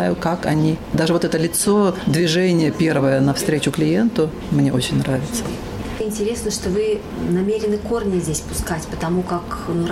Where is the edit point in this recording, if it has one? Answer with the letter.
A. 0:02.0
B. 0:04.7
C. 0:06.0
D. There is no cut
C